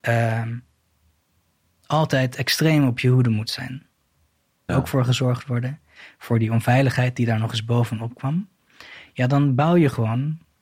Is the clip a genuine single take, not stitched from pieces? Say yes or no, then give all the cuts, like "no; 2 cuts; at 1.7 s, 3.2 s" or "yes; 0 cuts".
no; 1 cut; at 4.7 s